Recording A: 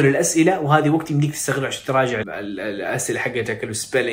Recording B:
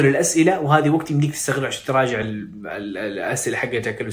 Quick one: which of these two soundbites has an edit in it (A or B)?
A